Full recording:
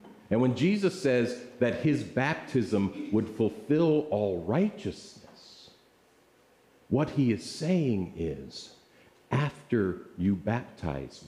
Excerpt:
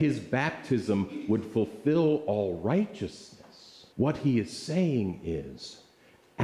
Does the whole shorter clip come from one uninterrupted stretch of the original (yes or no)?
no